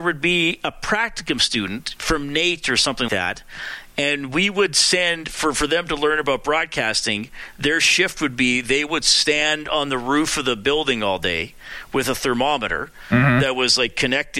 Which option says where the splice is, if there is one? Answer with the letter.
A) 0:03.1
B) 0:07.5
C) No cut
A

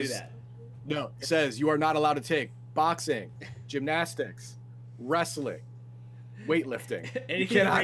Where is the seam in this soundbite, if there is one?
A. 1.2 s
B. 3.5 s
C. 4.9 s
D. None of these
A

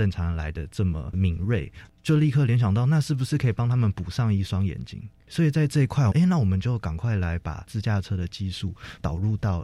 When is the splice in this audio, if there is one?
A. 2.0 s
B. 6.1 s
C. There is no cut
B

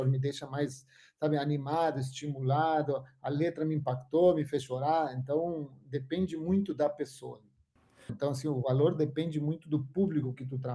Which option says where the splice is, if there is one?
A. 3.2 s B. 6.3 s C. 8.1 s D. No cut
C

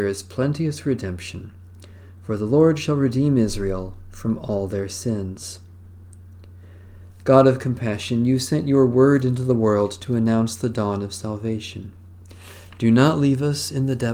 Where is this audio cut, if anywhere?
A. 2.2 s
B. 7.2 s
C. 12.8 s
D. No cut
D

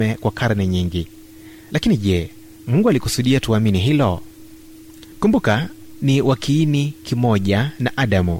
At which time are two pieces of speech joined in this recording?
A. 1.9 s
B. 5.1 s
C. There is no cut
B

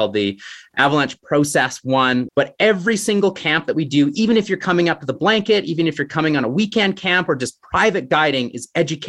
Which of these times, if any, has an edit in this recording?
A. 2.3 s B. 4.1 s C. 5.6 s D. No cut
A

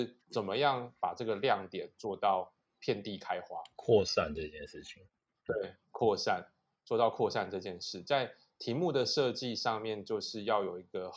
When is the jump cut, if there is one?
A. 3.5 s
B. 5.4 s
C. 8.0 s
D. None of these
D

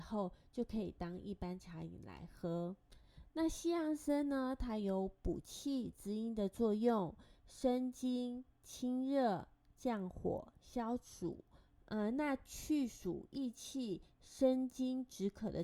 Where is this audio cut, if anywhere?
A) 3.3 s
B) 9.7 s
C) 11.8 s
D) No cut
C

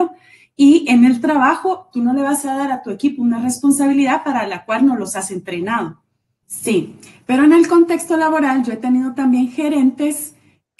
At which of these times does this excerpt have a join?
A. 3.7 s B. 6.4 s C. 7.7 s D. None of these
B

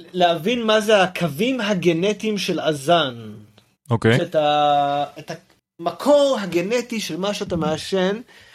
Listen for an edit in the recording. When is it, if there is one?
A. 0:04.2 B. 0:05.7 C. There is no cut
A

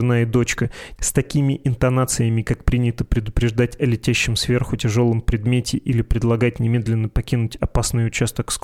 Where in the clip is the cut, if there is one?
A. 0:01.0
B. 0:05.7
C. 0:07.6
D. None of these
A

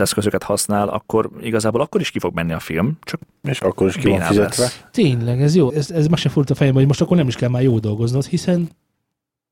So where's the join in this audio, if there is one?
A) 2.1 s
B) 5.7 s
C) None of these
B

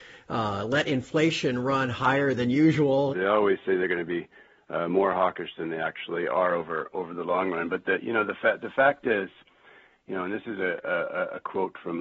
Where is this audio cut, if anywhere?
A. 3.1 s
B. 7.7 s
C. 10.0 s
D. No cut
A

